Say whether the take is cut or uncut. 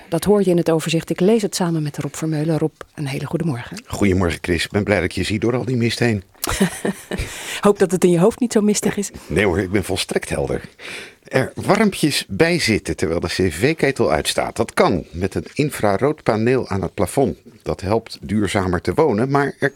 uncut